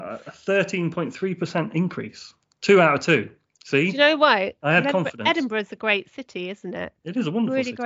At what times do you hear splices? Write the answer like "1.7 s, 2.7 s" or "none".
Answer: none